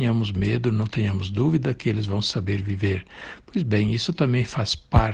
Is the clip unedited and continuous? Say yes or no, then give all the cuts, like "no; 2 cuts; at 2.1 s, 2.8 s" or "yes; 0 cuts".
yes; 0 cuts